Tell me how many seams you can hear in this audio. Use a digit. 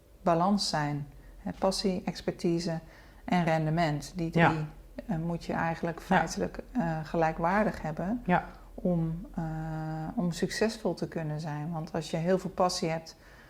0